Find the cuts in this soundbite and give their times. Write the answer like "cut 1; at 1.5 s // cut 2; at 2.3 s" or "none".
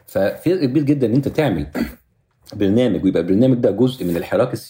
none

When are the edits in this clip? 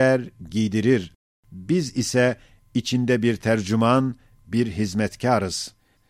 none

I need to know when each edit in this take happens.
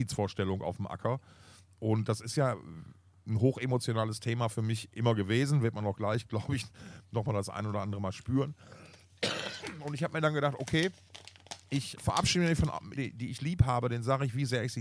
cut 1; at 11.9 s // cut 2; at 13.0 s

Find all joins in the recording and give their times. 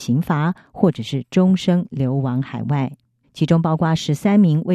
cut 1; at 3.2 s

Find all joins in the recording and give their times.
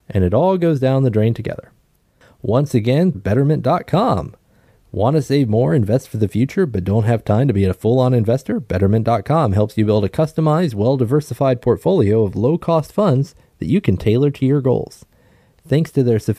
cut 1; at 3.1 s

